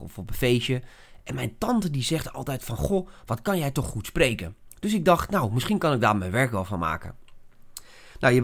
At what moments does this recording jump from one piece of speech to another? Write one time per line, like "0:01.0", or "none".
none